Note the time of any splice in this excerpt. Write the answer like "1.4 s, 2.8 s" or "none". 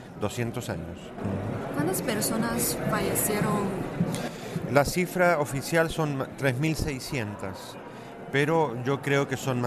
none

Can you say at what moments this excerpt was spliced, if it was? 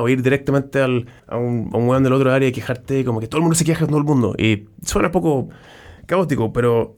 1.2 s

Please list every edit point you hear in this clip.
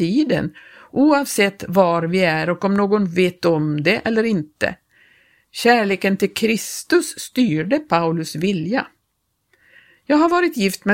none

